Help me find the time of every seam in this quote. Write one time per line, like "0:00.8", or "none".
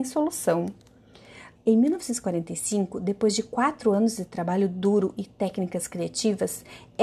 0:01.5